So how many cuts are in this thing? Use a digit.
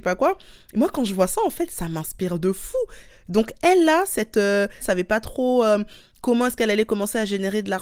2